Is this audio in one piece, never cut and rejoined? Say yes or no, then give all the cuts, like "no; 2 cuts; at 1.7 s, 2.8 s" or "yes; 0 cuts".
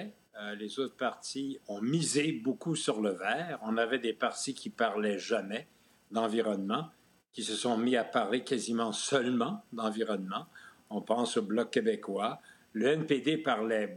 no; 1 cut; at 1.6 s